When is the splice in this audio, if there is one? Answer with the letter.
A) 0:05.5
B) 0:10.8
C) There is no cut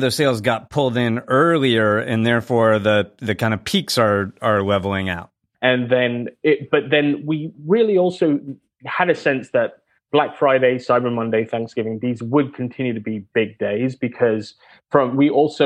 A